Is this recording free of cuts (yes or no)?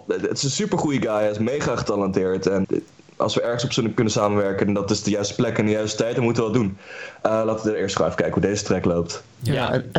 no